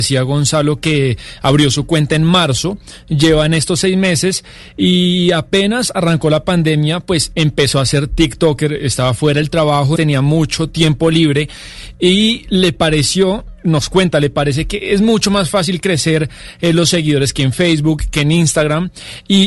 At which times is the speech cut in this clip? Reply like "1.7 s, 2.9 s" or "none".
10.0 s